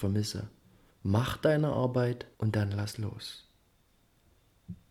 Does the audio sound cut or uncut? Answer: cut